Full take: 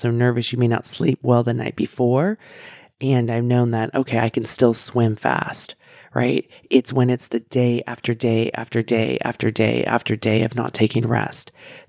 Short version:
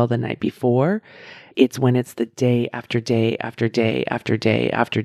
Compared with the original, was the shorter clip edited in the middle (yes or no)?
yes